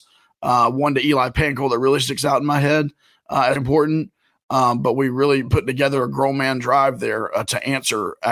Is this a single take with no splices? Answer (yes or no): no